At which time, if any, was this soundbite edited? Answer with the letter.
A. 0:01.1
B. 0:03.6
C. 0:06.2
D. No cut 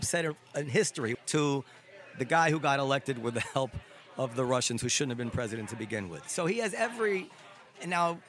A